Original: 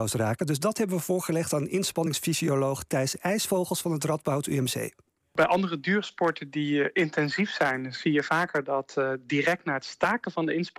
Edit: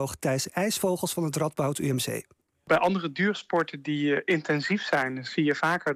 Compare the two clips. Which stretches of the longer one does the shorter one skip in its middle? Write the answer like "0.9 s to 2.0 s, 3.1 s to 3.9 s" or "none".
none